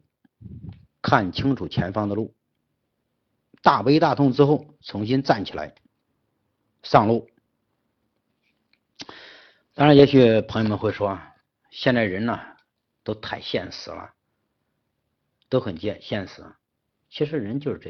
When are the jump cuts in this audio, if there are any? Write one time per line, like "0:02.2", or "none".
none